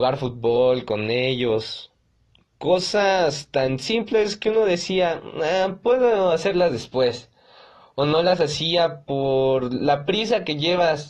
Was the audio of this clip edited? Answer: no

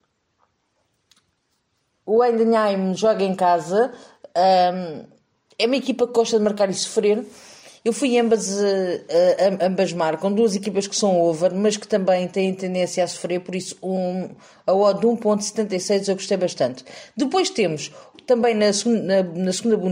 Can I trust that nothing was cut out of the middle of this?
yes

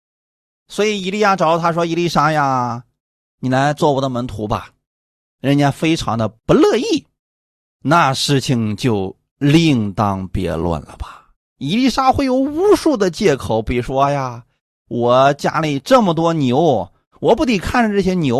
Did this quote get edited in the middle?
no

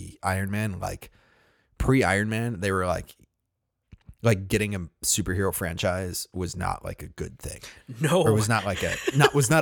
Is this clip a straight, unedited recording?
yes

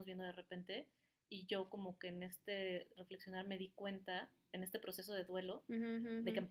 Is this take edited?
no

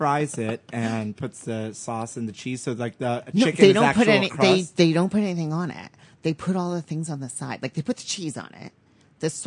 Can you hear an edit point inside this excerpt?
no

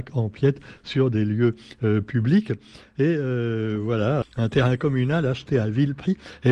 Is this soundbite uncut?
no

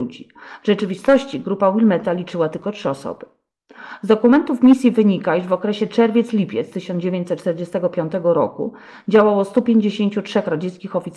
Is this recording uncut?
yes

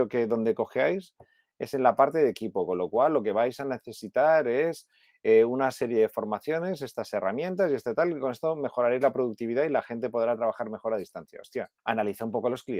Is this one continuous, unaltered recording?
no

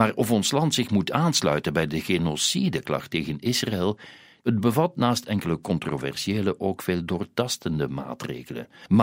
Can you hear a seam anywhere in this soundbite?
yes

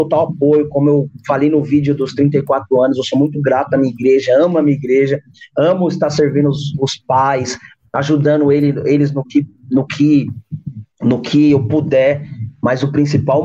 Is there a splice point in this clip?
no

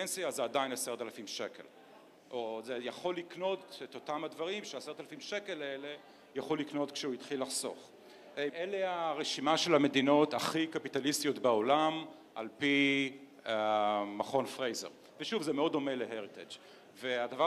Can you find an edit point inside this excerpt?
yes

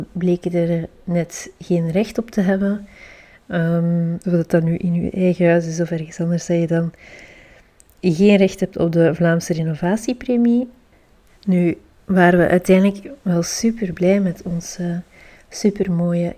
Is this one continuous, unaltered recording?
no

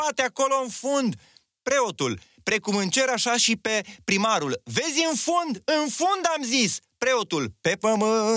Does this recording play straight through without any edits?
yes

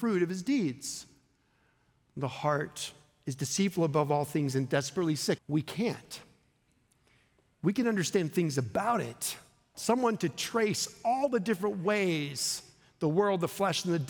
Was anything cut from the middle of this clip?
yes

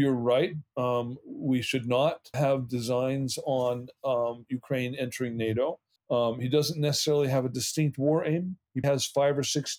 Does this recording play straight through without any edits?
no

